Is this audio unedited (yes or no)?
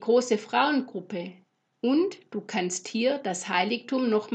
no